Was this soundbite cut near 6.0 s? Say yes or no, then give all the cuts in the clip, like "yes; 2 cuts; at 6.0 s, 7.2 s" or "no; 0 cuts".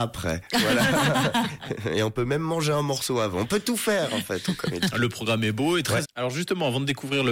yes; 1 cut; at 6.0 s